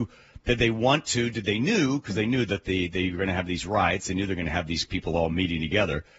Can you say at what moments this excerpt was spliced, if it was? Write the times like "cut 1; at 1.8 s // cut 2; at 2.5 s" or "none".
none